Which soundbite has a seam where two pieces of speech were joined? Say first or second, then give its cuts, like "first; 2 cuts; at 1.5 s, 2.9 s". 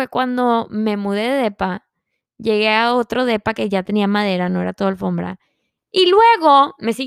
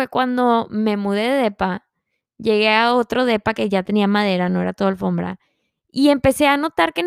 first; 1 cut; at 5.8 s